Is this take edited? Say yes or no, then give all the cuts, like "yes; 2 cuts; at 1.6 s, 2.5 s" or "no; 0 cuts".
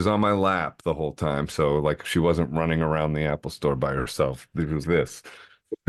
yes; 1 cut; at 4.8 s